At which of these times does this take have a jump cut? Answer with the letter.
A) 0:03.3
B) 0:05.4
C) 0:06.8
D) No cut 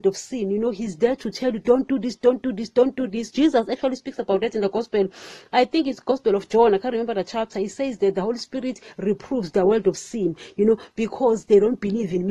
A